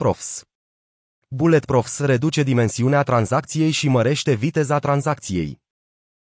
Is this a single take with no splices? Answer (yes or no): no